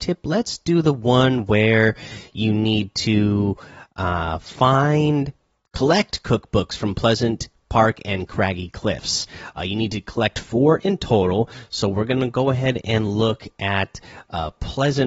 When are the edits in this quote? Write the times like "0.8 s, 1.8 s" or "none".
none